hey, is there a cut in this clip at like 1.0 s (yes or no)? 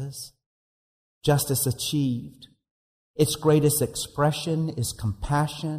no